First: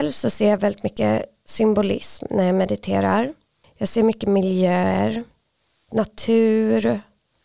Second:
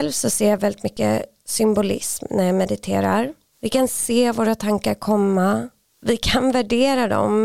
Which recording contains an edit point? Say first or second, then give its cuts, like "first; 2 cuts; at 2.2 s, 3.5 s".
second; 1 cut; at 3.5 s